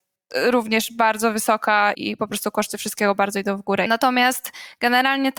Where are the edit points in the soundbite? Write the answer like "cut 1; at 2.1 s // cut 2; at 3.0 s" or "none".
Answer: cut 1; at 1.9 s // cut 2; at 3.9 s